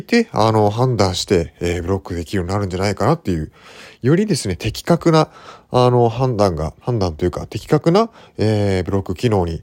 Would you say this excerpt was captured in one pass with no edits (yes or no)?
no